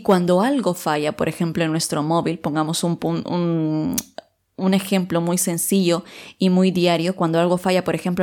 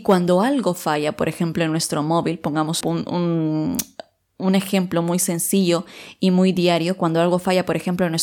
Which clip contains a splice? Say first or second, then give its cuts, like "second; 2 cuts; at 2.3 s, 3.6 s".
second; 1 cut; at 2.8 s